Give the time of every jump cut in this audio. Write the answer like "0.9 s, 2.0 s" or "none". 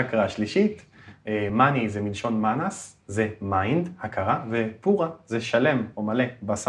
none

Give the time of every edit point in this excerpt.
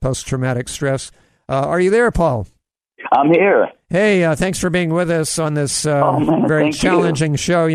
none

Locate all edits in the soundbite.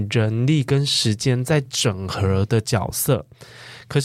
none

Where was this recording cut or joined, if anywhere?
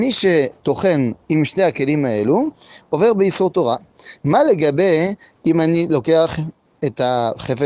4.2 s

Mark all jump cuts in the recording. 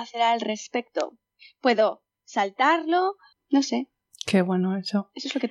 3.3 s

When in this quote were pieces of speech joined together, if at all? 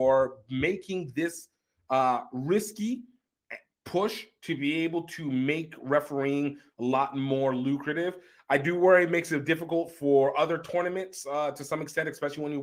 none

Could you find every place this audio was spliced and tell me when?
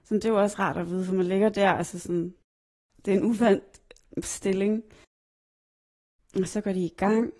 none

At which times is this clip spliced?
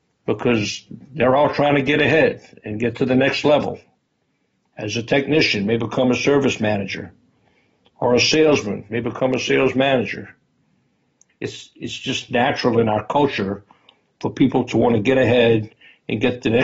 11.3 s

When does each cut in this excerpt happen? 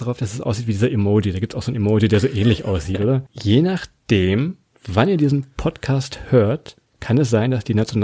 3.3 s

